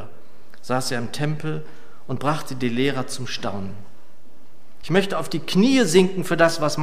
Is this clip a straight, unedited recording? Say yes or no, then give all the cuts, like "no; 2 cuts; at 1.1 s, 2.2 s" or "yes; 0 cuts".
no; 1 cut; at 4.8 s